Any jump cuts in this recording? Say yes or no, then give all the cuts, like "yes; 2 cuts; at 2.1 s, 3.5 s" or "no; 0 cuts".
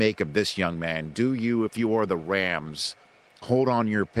no; 0 cuts